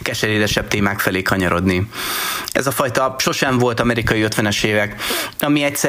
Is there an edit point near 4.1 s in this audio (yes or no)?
no